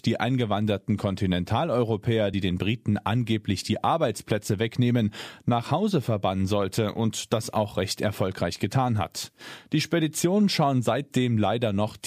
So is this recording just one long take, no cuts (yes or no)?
yes